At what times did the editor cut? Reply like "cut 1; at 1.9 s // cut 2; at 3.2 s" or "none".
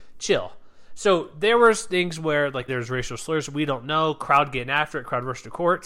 cut 1; at 2.7 s